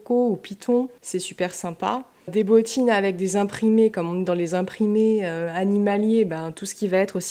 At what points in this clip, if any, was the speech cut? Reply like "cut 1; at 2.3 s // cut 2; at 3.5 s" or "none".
none